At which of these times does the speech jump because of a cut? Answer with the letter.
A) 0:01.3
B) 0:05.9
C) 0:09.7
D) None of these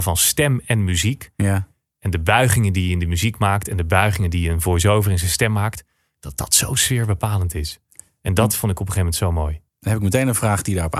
C